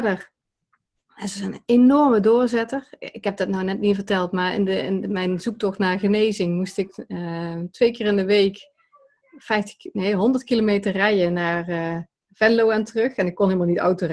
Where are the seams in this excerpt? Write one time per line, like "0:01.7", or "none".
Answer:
none